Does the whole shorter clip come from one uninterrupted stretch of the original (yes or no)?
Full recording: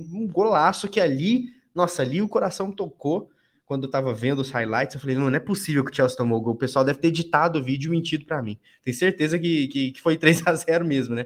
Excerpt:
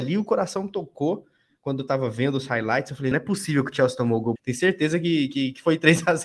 no